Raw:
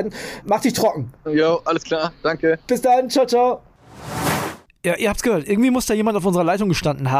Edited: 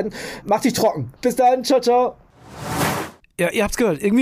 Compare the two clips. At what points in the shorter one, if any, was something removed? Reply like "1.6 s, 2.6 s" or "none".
1.2 s